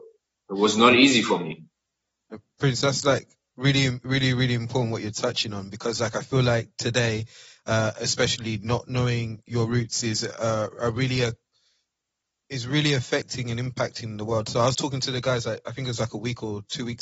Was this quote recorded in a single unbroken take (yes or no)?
yes